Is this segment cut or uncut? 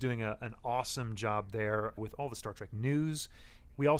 cut